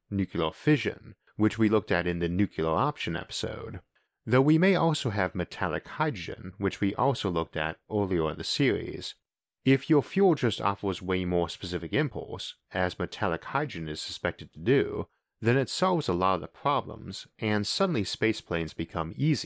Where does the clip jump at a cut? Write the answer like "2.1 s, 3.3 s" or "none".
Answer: none